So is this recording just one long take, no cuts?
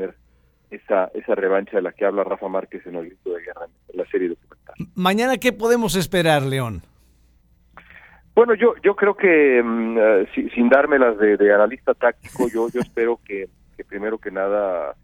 no; 1 cut; at 13.7 s

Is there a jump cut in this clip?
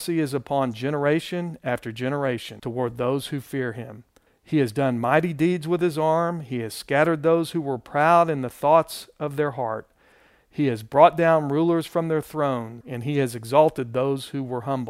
no; 0 cuts

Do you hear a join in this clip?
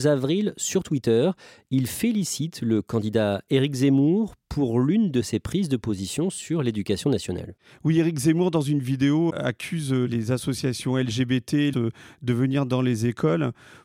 yes; 2 cuts; at 9.3 s, 11.7 s

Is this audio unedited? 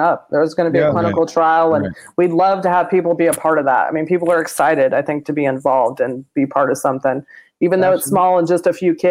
yes; 0 cuts

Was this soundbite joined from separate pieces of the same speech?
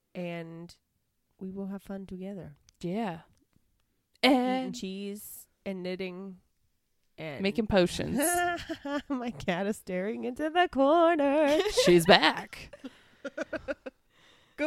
no; 0 cuts

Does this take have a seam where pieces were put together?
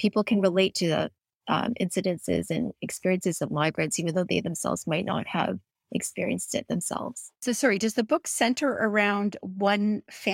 no; 0 cuts

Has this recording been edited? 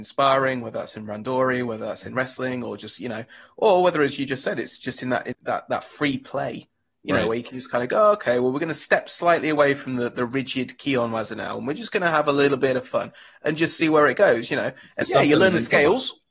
yes; 2 cuts; at 5.3 s, 15.0 s

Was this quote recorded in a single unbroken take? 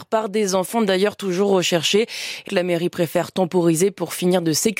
no; 1 cut; at 2.5 s

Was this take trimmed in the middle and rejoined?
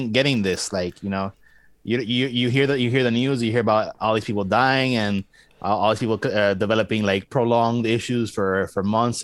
no; 0 cuts

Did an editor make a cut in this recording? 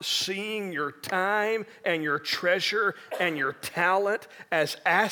no; 0 cuts

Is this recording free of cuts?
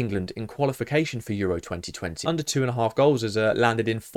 no; 1 cut; at 2.2 s

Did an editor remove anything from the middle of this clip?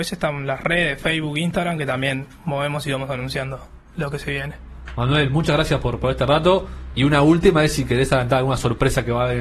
yes; 1 cut; at 6.9 s

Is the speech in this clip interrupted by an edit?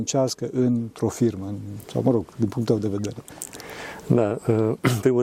no; 0 cuts

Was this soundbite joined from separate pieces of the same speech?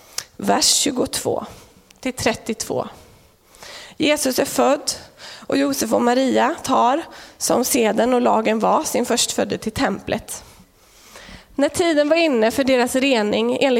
no; 0 cuts

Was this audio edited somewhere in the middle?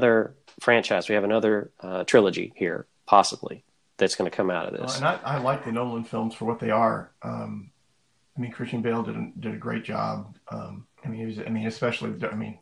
yes; 1 cut; at 10.9 s

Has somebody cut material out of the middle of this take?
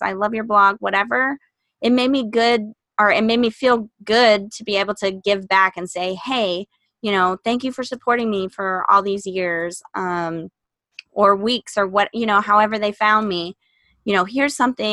no; 0 cuts

